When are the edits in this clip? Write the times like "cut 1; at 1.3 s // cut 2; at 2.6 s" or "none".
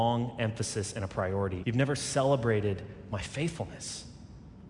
cut 1; at 1.6 s